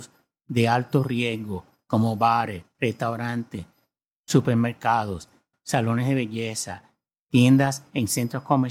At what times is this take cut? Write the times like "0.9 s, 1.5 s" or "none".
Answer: 5.5 s